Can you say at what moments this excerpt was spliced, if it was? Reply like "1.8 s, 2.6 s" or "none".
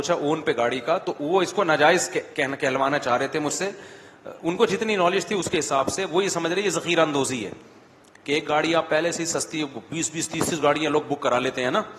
none